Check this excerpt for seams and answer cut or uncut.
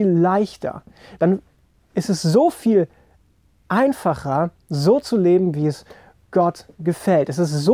uncut